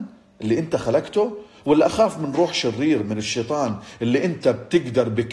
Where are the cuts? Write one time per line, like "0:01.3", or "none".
none